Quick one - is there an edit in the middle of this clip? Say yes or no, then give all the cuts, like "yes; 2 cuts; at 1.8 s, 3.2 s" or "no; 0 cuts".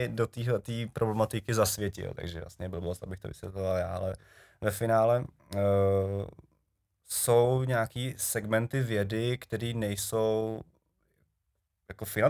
no; 0 cuts